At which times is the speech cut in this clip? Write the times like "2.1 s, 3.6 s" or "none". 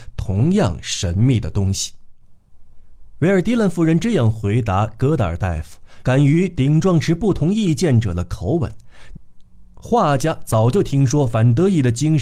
2.2 s, 6.0 s, 9.1 s